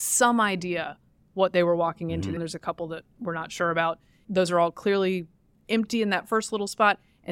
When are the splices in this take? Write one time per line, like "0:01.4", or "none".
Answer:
0:02.4
0:04.2